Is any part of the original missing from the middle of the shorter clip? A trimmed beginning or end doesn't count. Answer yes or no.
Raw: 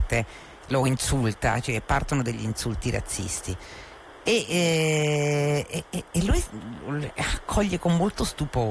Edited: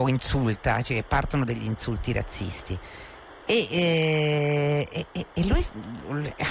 no